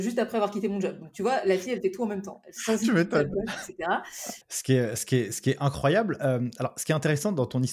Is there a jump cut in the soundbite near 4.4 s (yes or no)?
yes